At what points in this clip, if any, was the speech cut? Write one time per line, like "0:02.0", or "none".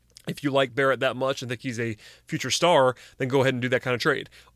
none